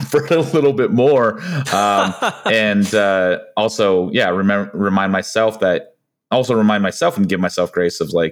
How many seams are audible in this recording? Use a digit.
0